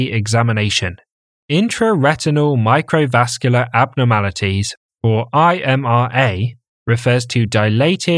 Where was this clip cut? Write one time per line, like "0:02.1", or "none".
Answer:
0:01.4